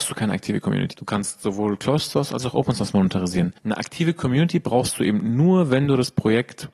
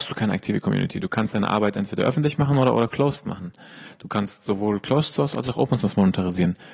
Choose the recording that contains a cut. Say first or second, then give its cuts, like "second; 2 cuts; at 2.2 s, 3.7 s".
first; 2 cuts; at 0.9 s, 3.6 s